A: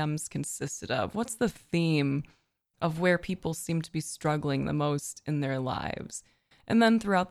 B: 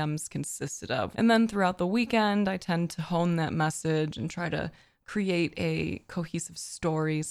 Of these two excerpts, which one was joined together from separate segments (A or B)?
B